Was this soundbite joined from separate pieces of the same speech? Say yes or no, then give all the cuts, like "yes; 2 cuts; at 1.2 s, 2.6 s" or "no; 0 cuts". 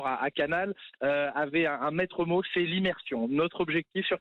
no; 0 cuts